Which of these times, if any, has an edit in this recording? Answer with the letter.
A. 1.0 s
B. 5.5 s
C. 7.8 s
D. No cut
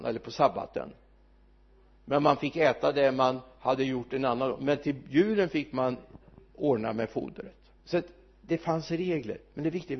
C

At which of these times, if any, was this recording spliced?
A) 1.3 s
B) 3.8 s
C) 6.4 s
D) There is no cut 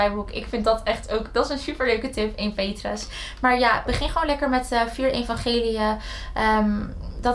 D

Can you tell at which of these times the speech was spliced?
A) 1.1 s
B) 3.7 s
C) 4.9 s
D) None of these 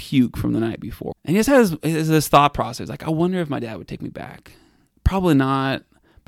A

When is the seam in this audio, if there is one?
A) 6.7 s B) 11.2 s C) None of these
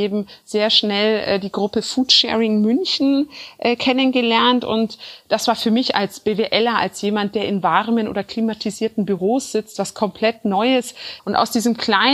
B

